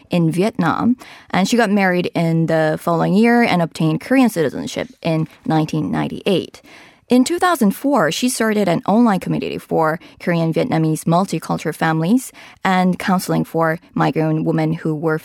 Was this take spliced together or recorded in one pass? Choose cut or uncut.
uncut